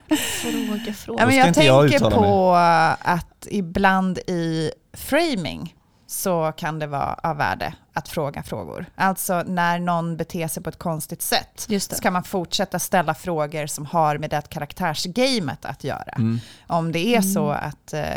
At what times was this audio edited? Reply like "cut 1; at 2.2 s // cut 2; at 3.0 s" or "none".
none